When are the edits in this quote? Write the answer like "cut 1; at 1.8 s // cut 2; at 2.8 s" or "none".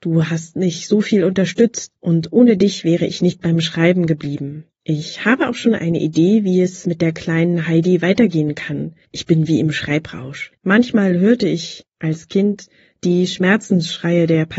cut 1; at 9.0 s // cut 2; at 10.6 s